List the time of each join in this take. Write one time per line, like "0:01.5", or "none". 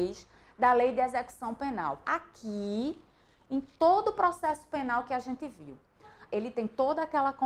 0:02.0
0:06.3